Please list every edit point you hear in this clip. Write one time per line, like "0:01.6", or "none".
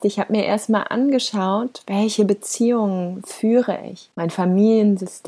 0:04.1